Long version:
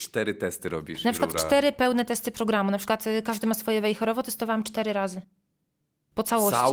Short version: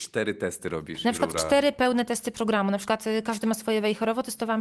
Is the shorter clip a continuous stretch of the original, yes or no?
yes